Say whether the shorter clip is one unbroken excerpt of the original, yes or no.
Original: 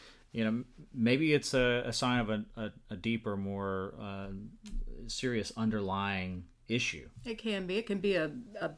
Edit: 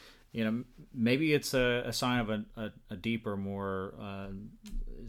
yes